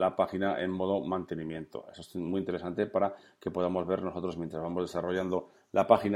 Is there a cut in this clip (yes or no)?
no